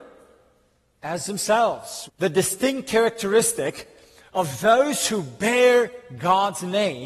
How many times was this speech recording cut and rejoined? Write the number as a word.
one